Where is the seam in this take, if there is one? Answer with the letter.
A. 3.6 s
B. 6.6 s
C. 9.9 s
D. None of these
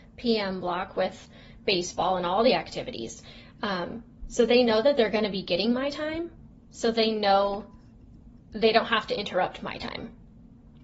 D